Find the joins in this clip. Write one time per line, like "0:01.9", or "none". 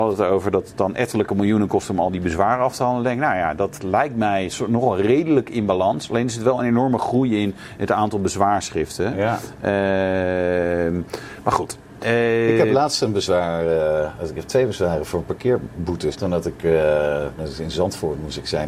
0:12.0
0:16.1
0:17.4